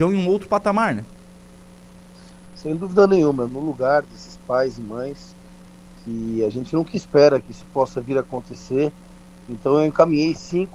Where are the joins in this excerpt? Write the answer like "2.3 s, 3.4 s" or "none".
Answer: 3.5 s